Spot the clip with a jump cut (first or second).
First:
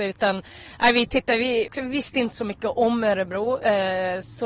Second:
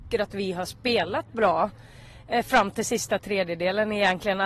first